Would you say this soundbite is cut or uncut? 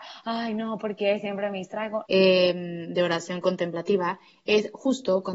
cut